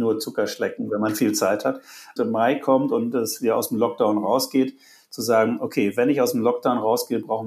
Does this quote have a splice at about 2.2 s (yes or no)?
yes